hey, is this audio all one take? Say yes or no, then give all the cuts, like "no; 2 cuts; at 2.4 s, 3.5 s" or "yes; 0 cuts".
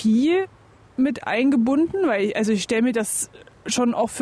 yes; 0 cuts